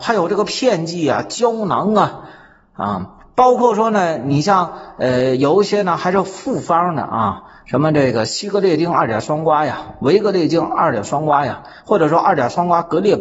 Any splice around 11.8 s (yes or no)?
no